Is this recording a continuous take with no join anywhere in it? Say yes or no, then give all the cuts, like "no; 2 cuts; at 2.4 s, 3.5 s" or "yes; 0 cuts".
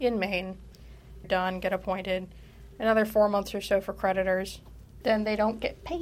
no; 2 cuts; at 1.2 s, 5.0 s